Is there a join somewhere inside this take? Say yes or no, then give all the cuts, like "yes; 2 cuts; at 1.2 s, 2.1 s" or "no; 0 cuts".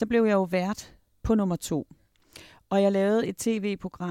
no; 0 cuts